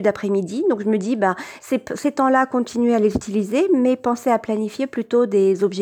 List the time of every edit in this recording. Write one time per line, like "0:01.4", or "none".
none